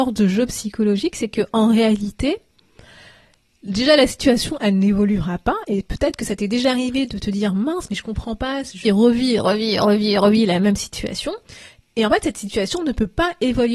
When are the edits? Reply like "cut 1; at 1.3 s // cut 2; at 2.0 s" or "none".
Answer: cut 1; at 8.8 s